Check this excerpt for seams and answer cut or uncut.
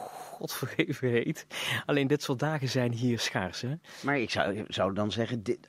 uncut